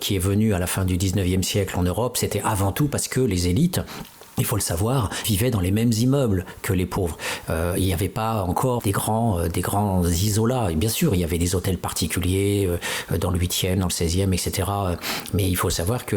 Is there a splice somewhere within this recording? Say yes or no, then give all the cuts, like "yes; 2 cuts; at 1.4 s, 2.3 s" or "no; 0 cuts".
yes; 2 cuts; at 5.2 s, 8.8 s